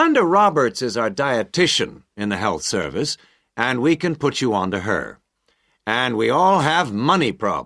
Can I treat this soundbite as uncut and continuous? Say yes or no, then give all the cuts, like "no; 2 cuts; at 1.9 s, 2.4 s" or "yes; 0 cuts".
yes; 0 cuts